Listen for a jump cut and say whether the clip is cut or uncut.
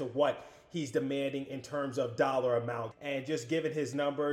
cut